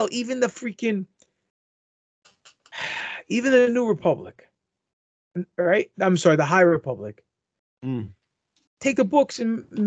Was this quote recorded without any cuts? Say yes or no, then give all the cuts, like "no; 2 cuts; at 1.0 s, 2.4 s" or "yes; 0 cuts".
yes; 0 cuts